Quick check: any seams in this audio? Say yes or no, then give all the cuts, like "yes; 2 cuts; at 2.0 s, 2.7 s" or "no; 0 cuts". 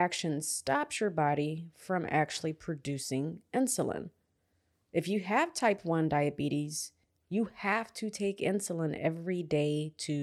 no; 0 cuts